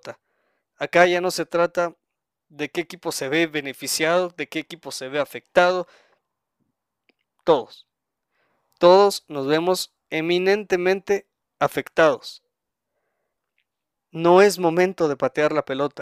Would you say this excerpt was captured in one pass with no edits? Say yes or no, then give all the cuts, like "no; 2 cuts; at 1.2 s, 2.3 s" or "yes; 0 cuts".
no; 1 cut; at 7.2 s